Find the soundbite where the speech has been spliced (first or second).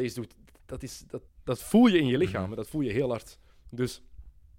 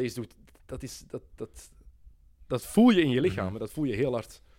first